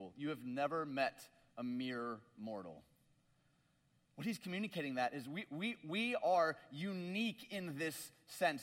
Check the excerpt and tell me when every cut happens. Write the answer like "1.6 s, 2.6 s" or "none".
none

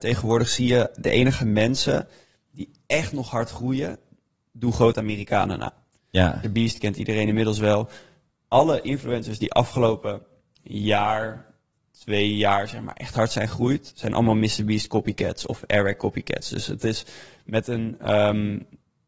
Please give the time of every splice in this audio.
6.4 s

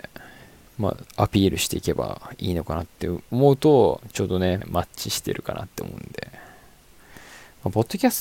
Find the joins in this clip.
1.0 s, 4.6 s

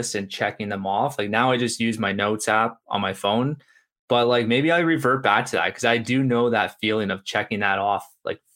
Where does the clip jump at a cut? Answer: none

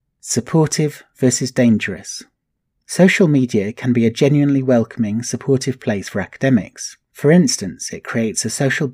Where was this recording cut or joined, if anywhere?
none

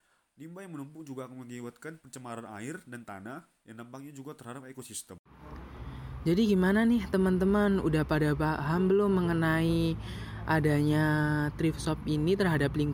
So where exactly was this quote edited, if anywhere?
none

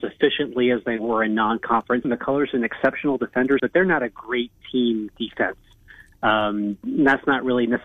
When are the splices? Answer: 2.0 s, 3.6 s

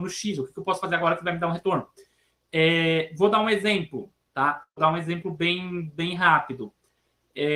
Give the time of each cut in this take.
none

